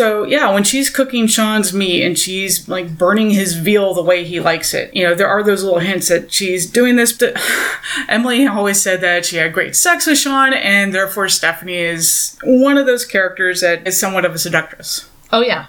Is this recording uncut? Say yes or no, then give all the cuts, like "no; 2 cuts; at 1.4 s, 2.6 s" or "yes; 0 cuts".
no; 1 cut; at 13.9 s